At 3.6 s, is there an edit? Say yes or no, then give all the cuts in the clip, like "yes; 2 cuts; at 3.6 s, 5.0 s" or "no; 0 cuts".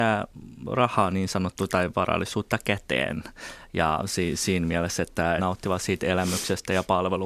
no; 1 cut; at 5.4 s